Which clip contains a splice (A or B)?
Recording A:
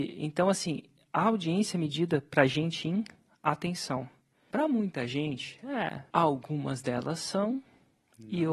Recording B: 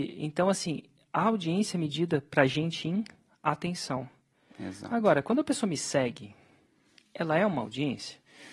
A